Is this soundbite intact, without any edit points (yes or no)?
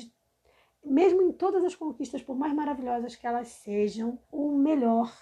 no